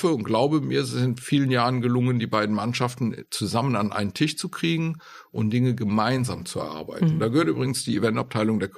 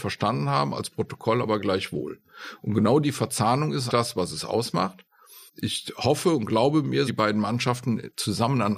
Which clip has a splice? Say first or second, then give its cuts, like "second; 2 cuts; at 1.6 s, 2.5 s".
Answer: second; 3 cuts; at 3.9 s, 5.5 s, 7.1 s